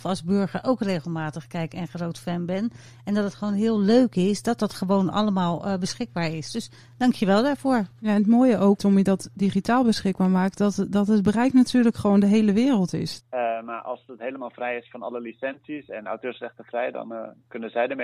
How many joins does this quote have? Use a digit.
2